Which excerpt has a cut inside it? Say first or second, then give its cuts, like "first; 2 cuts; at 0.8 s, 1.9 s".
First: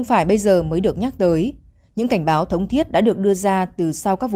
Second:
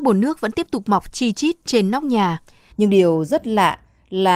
second; 1 cut; at 2.7 s